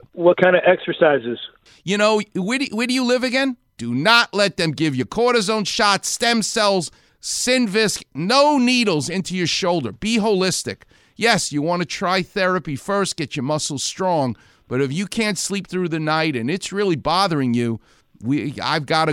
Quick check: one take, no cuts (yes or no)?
no